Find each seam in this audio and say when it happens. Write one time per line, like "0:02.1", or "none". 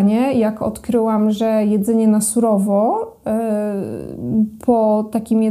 none